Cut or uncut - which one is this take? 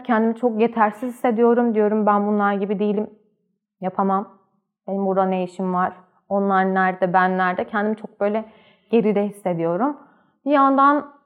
uncut